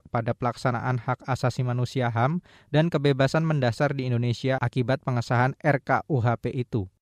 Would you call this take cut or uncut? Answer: uncut